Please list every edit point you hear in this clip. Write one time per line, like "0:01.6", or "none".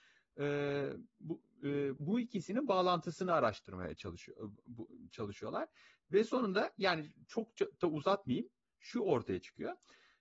0:02.0